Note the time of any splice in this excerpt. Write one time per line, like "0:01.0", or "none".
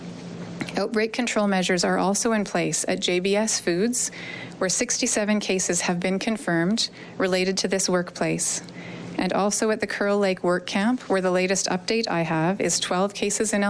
none